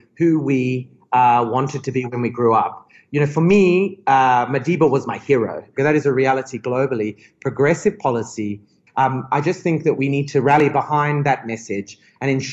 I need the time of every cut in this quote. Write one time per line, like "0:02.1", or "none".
0:05.8
0:08.9